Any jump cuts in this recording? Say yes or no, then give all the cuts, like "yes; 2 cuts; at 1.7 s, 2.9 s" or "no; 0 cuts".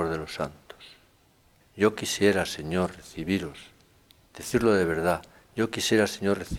yes; 1 cut; at 1.6 s